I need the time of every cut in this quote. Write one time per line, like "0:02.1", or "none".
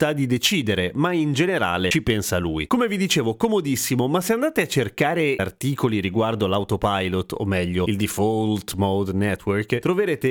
none